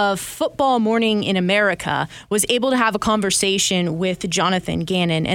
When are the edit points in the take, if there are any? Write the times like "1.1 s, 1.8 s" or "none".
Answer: none